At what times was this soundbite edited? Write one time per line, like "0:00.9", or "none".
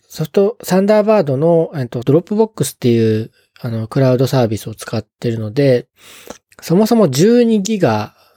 0:02.0
0:06.5